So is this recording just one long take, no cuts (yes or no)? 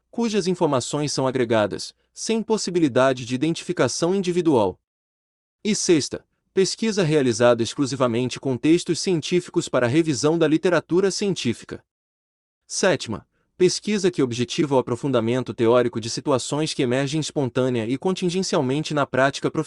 yes